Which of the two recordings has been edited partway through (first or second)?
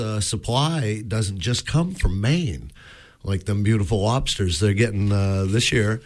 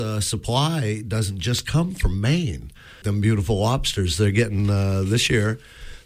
second